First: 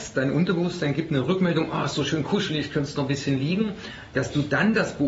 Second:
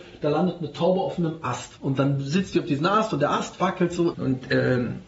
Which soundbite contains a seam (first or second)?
second